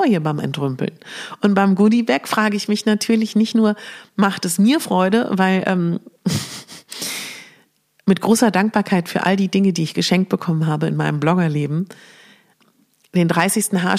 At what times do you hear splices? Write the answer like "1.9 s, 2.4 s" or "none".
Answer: none

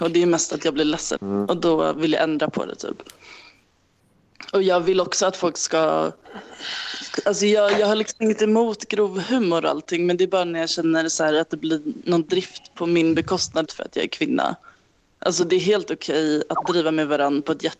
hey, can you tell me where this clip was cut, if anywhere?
1.2 s, 13.7 s

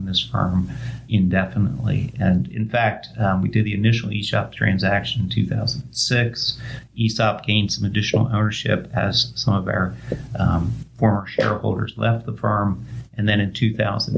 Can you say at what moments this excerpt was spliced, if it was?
1.1 s

